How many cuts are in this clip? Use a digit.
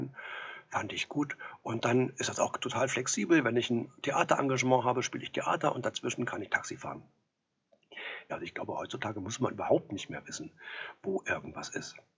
1